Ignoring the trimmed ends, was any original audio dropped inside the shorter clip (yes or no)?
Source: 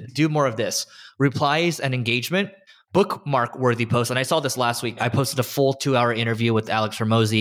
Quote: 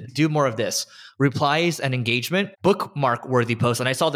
yes